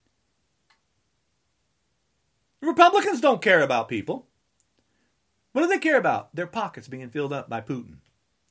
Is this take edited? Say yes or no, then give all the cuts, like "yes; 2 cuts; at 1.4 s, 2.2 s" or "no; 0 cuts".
no; 0 cuts